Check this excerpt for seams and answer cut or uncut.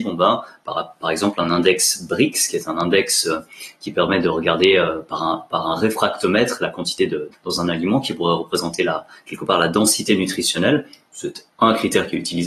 cut